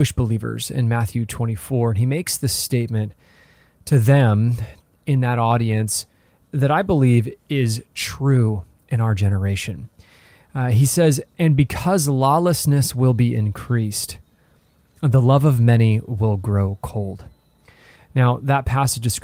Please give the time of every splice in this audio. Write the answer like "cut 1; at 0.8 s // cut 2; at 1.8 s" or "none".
none